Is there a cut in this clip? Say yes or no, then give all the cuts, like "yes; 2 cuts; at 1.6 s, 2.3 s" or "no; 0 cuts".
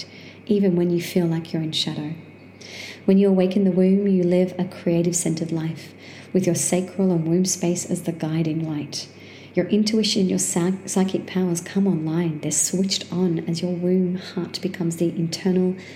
no; 0 cuts